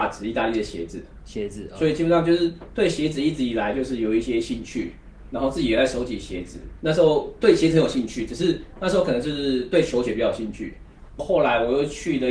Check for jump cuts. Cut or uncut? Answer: cut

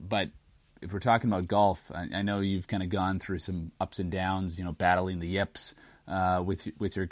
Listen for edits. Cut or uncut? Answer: uncut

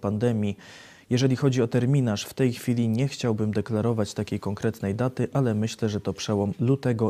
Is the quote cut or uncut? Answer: uncut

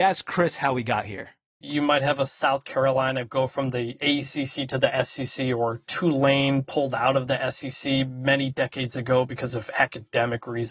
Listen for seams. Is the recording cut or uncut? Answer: cut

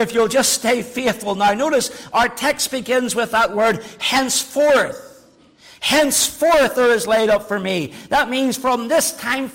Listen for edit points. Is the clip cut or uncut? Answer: uncut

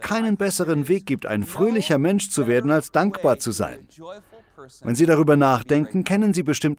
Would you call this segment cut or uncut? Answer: uncut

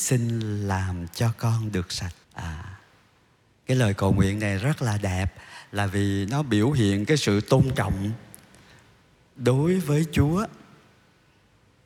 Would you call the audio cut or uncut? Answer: cut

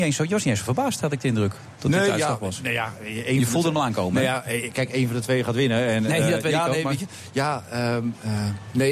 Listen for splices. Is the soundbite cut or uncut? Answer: uncut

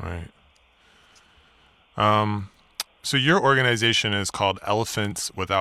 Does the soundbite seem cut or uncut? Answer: cut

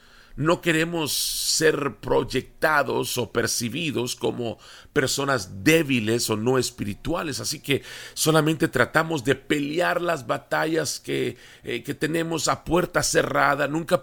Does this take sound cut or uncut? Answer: cut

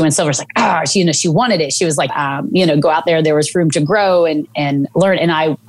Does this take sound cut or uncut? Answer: cut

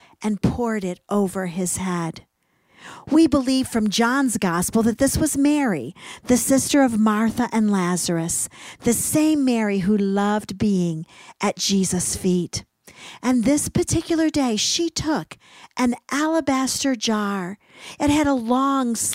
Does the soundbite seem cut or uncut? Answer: cut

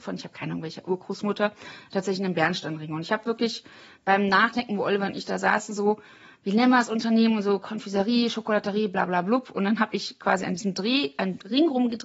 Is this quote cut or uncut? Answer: uncut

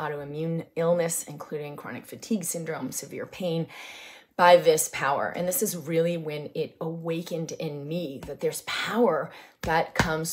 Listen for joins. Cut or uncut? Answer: uncut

